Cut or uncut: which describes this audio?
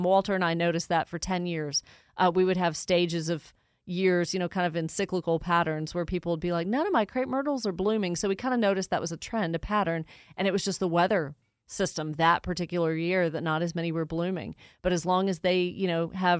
uncut